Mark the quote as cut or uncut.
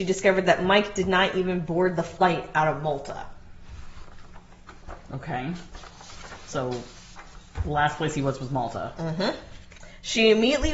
uncut